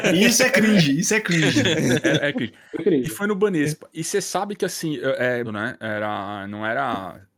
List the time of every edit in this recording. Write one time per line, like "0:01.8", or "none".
0:05.4